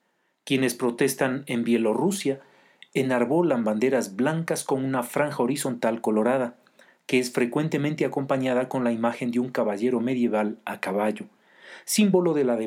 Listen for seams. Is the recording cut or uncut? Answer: uncut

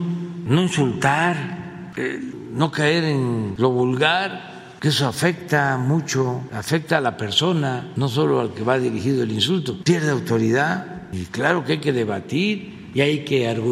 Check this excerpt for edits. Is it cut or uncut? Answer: cut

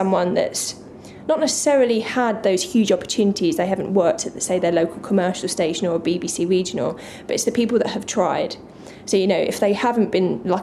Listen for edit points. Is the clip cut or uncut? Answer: uncut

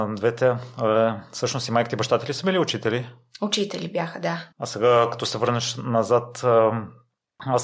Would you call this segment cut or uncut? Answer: cut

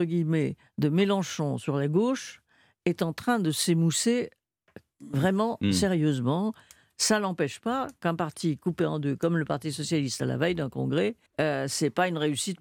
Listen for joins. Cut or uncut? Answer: cut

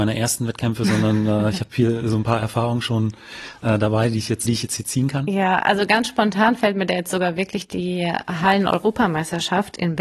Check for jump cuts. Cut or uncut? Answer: cut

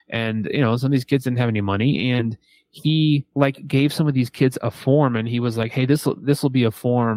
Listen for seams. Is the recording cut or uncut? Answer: cut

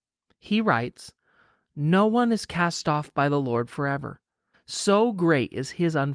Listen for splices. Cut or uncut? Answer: cut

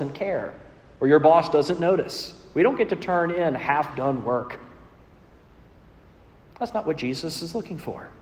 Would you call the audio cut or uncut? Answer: uncut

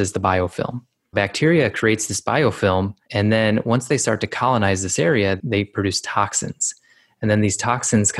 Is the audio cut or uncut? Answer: cut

